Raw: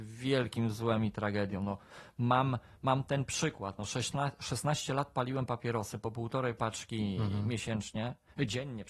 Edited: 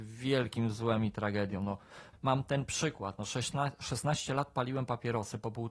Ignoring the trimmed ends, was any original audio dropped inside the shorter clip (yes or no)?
yes